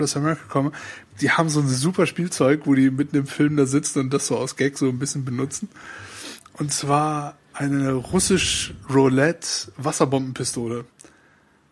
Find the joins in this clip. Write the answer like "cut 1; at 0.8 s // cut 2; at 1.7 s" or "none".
none